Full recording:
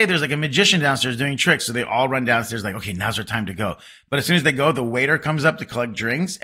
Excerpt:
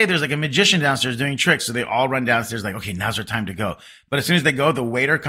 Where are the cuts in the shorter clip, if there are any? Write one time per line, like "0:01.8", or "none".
none